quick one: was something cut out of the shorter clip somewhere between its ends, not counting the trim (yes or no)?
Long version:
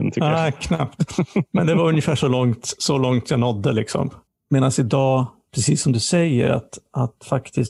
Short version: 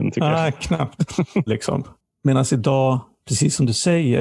yes